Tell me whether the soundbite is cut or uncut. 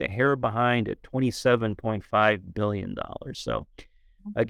uncut